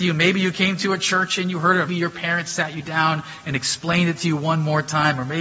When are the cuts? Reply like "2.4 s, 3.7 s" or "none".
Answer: 1.9 s